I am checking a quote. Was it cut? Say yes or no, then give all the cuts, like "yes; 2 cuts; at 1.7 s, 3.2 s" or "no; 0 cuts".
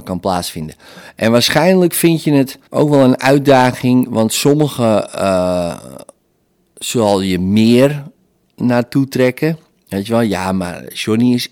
yes; 1 cut; at 2.7 s